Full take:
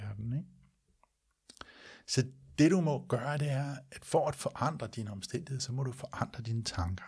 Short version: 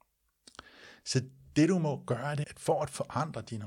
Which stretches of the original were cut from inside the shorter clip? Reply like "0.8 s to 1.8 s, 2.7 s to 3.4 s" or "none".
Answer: 3.5 s to 3.9 s